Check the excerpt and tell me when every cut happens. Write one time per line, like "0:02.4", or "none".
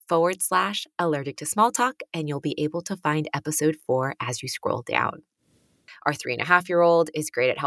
0:05.9